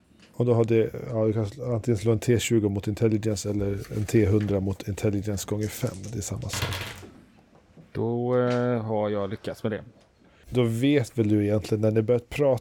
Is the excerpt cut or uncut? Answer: uncut